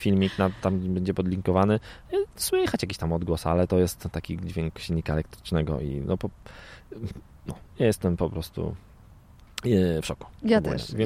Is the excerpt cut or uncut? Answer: uncut